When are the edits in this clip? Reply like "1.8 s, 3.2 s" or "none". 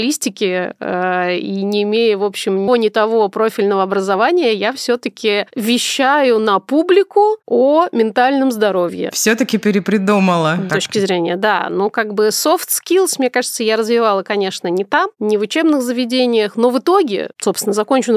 2.7 s, 10.7 s